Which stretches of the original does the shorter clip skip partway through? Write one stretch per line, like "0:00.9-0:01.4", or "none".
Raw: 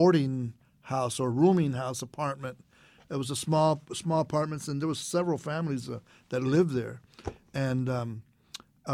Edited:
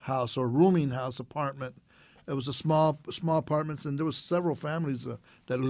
none